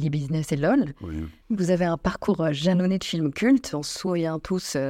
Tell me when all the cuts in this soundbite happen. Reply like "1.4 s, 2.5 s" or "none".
1.4 s